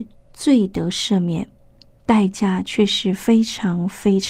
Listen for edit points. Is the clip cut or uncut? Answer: uncut